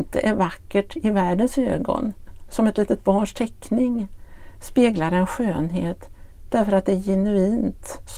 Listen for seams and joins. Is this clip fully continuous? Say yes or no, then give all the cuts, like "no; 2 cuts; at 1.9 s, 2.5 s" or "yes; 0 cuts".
yes; 0 cuts